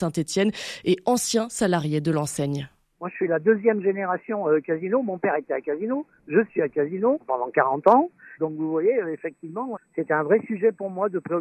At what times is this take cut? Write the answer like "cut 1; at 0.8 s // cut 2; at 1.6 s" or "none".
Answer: cut 1; at 8.4 s // cut 2; at 9.8 s